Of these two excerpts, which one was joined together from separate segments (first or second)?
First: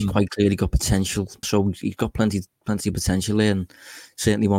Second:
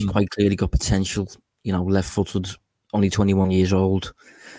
first